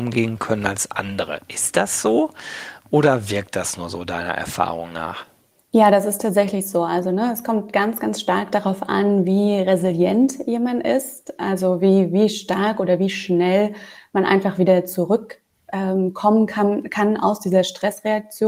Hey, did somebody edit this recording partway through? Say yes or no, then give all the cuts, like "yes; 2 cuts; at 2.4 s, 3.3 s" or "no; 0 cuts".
no; 0 cuts